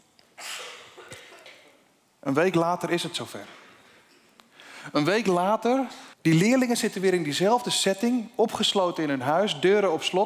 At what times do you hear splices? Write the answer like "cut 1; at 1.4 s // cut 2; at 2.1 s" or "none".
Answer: cut 1; at 6.1 s

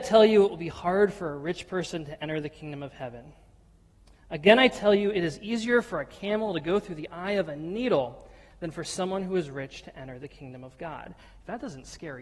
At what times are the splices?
none

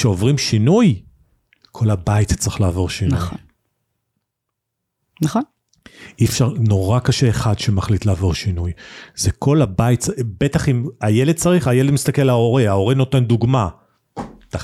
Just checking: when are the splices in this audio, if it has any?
none

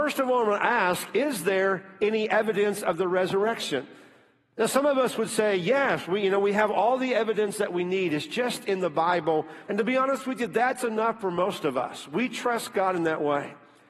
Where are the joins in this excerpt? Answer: cut 1; at 9.7 s

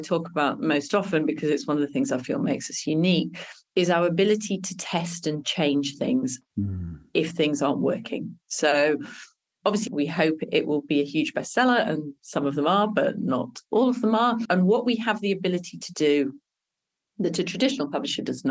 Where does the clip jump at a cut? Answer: cut 1; at 9.9 s // cut 2; at 14.4 s

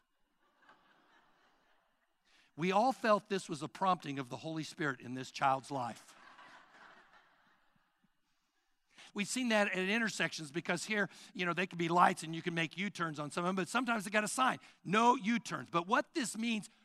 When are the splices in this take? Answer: cut 1; at 9.1 s

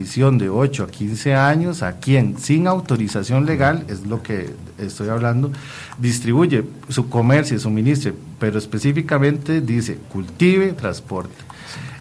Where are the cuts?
cut 1; at 10.8 s

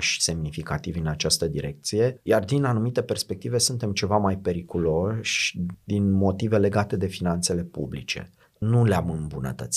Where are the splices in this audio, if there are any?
none

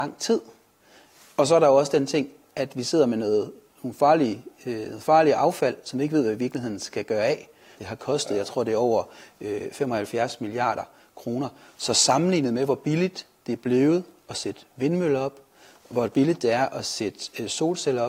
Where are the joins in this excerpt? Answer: cut 1; at 7.8 s

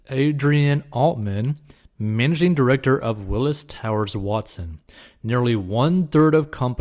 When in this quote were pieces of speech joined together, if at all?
none

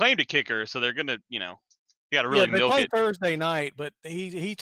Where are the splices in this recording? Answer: none

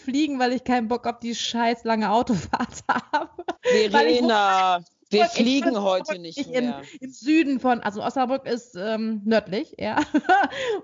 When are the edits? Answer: cut 1; at 3.6 s

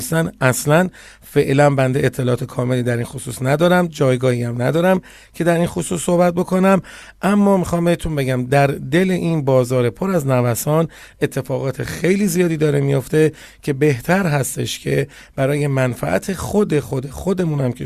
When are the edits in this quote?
none

